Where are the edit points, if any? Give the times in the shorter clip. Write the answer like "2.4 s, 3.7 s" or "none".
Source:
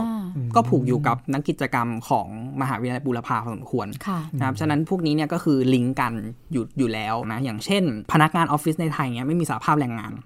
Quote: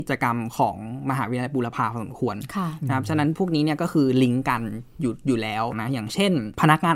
none

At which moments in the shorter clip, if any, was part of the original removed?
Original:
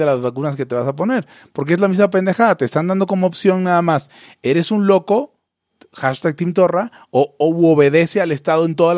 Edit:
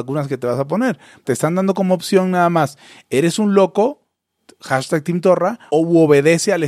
1.2 s, 5.7 s

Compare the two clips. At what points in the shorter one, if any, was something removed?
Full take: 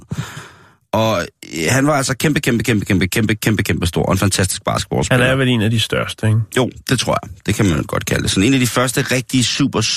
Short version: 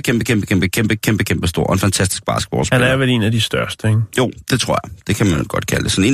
none

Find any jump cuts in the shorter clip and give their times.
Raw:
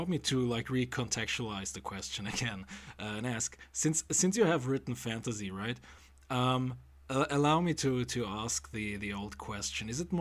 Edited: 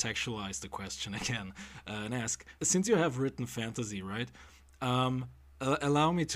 2.6 s

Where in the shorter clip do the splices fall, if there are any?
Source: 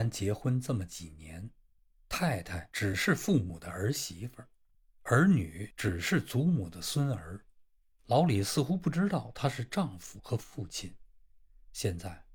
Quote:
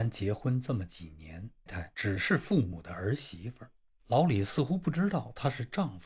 1.7 s, 3.9 s

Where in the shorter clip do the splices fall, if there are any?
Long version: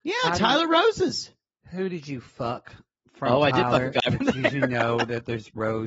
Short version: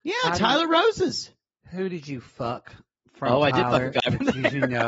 none

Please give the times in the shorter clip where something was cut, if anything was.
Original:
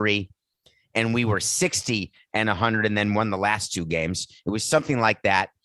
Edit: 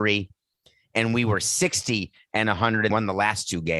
2.9 s

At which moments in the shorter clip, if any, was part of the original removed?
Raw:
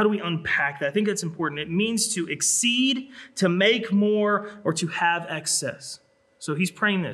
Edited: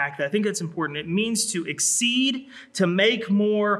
none

